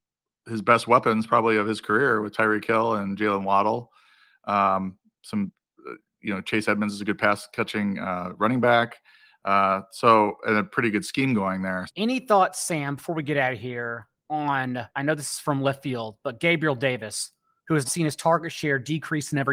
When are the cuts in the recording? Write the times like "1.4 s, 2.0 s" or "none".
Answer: 11.9 s, 14.9 s, 17.8 s